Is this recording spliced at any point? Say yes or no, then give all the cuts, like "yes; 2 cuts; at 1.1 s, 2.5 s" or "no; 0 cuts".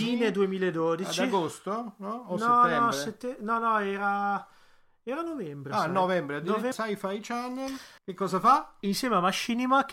yes; 2 cuts; at 6.7 s, 8.0 s